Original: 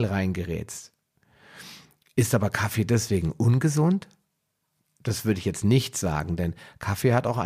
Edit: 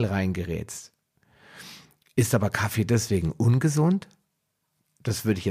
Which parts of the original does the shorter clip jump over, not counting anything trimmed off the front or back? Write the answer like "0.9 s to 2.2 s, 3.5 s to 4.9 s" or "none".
none